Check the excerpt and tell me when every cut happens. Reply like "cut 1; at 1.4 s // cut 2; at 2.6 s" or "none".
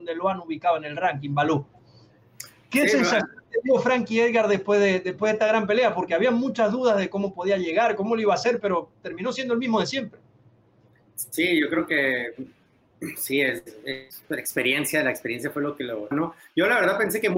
cut 1; at 16.1 s